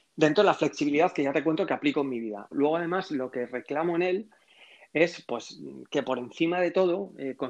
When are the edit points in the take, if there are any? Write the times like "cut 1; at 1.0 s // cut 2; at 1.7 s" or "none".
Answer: cut 1; at 2.5 s